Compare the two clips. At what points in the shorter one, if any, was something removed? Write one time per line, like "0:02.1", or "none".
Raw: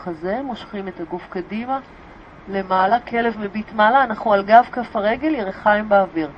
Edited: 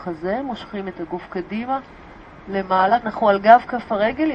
0:03.0